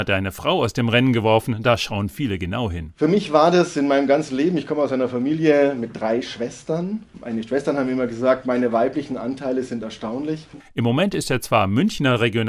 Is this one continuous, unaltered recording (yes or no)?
no